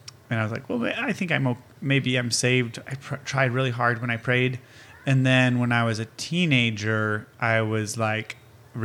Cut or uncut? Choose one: uncut